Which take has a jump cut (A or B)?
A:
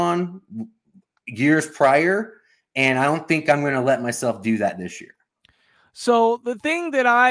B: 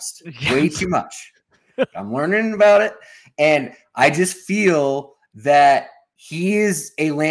B